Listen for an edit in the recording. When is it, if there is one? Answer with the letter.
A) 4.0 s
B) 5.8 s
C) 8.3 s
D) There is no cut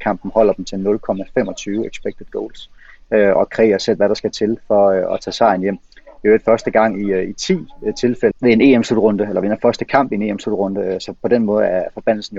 C